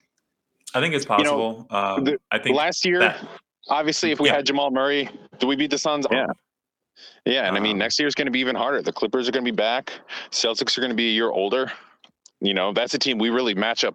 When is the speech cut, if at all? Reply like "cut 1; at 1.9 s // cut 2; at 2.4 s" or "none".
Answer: cut 1; at 6.1 s